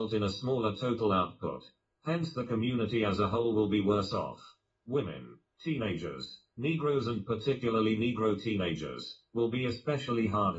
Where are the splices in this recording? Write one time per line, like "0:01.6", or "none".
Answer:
none